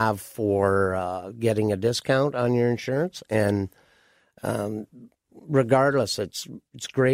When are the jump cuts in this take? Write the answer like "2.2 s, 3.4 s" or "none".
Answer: none